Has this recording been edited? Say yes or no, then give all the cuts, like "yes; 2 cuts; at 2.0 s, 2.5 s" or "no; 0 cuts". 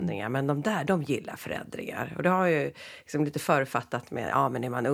no; 0 cuts